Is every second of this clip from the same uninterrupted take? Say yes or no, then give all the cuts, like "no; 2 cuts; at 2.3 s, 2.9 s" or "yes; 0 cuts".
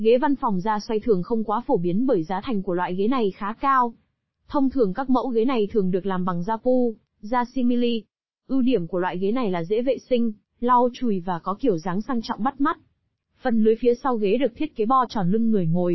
no; 1 cut; at 13.2 s